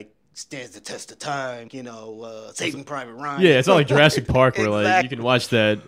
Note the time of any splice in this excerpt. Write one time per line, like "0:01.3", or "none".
0:01.7